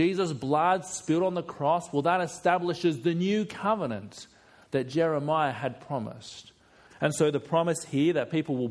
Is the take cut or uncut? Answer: cut